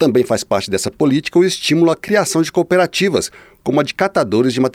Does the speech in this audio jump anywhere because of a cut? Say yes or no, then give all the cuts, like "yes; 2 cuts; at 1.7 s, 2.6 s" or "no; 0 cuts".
no; 0 cuts